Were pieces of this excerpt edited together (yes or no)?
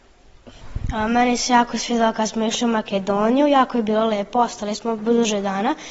no